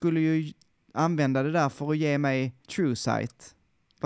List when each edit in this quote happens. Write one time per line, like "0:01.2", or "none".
0:02.6